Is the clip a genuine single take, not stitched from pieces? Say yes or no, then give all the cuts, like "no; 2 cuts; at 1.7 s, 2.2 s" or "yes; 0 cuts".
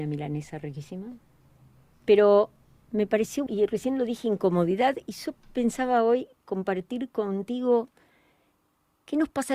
no; 1 cut; at 3.5 s